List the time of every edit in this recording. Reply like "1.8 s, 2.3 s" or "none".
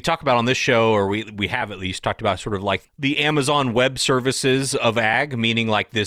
none